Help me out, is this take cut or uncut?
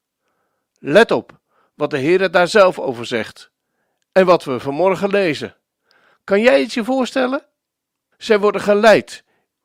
cut